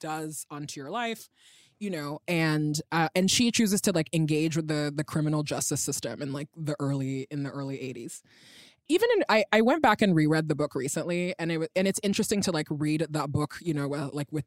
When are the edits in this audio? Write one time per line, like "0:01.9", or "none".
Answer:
none